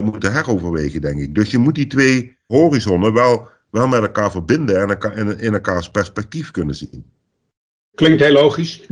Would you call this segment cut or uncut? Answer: uncut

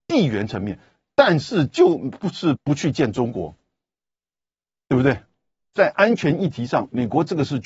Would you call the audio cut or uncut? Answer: cut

